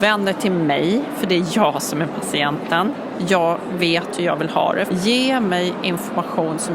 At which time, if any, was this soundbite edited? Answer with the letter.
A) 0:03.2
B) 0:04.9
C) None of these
B